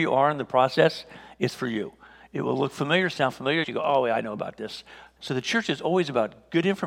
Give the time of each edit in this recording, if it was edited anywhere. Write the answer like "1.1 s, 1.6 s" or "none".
3.6 s, 5.2 s